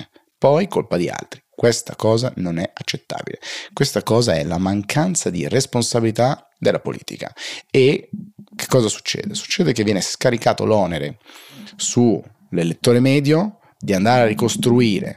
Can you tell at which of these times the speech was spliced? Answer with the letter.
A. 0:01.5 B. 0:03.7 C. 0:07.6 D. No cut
D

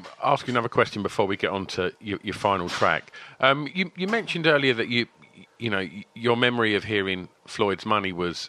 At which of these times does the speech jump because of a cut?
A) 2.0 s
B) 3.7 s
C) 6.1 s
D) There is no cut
B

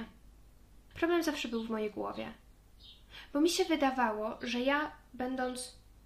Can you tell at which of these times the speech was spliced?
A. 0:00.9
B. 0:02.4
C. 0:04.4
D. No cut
A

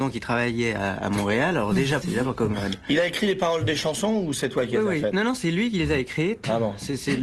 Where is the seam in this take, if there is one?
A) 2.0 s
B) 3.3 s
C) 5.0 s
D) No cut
A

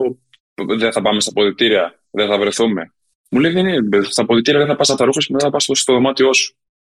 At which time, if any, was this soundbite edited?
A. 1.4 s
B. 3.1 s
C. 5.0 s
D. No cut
C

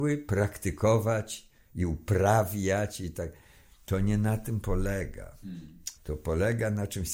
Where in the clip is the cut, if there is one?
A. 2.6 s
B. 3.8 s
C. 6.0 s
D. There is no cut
C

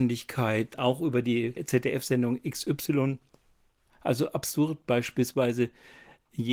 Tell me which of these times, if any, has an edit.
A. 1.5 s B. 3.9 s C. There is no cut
B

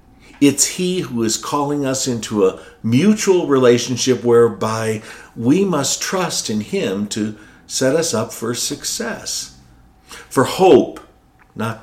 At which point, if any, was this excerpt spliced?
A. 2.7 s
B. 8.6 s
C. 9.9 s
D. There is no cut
C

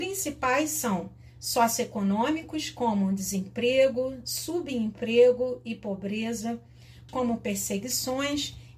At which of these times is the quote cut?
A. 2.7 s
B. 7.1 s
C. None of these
B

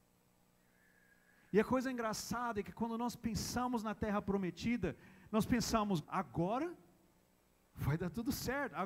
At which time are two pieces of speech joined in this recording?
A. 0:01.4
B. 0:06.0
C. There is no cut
B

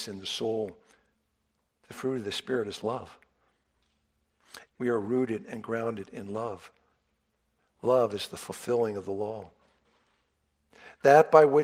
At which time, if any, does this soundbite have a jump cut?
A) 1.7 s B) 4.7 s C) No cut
B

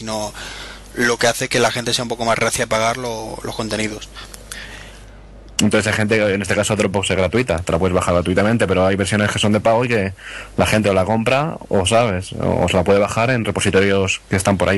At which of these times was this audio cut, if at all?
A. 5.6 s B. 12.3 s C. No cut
A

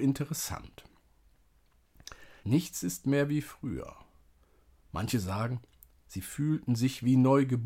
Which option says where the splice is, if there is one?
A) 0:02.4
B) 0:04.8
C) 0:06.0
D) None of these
A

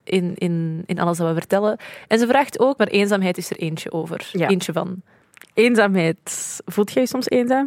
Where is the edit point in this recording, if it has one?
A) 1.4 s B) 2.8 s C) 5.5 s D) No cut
B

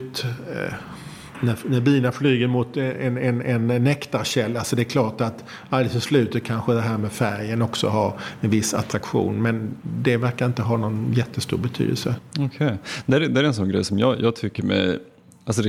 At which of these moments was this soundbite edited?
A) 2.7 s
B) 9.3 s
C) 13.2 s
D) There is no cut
D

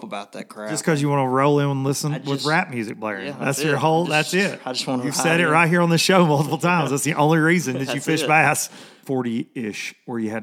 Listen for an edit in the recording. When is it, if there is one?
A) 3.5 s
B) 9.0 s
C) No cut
B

